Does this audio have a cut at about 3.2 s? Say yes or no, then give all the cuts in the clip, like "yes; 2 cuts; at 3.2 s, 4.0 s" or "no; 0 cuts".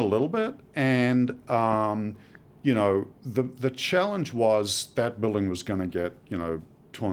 yes; 2 cuts; at 3.2 s, 4.9 s